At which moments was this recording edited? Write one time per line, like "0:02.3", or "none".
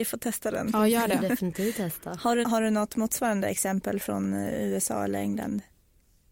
0:02.4